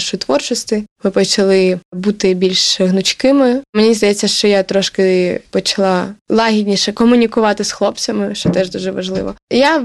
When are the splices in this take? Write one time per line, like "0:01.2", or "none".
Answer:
none